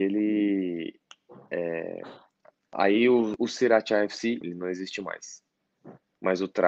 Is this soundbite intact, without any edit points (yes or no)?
no